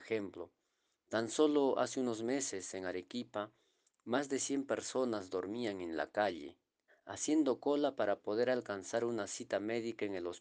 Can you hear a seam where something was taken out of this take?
yes; 1 cut; at 6.9 s

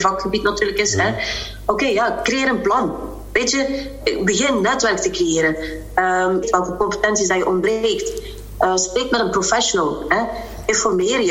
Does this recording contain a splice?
yes; 1 cut; at 6.4 s

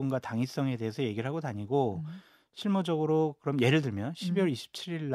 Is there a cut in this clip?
no; 0 cuts

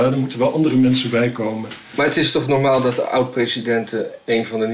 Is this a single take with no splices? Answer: yes; 0 cuts

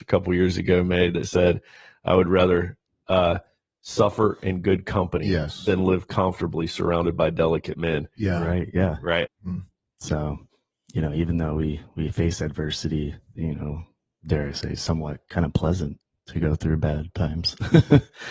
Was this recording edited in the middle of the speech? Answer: yes; 2 cuts; at 9.3 s, 13.4 s

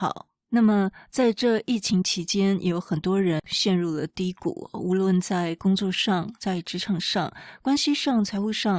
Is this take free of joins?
yes; 0 cuts

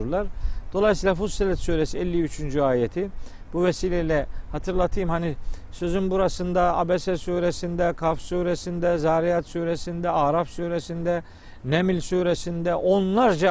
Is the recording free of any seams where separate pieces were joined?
yes; 0 cuts

